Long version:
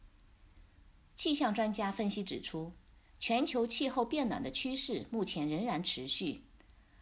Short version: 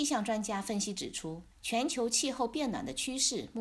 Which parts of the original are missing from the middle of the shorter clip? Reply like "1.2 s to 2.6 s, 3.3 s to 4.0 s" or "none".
2.8 s to 3.1 s